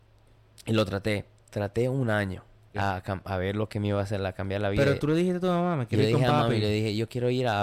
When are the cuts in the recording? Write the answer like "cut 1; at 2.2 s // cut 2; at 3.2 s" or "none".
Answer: cut 1; at 2.7 s